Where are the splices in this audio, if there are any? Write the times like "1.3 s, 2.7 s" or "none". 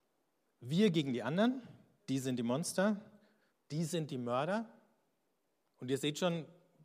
2.0 s, 3.5 s